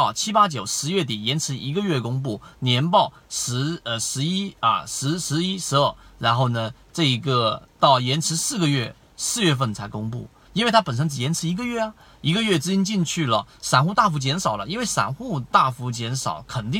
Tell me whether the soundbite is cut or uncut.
cut